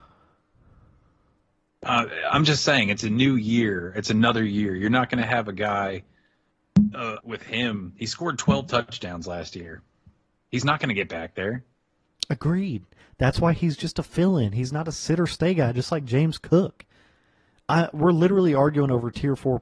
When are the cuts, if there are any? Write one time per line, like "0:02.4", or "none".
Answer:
0:07.2